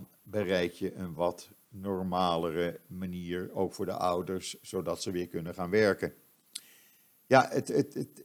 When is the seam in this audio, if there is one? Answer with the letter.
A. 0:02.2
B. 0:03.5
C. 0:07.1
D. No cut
D